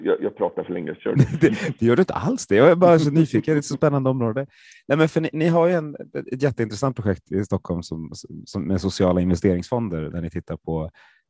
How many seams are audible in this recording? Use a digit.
0